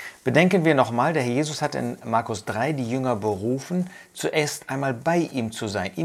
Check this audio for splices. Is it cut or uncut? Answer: uncut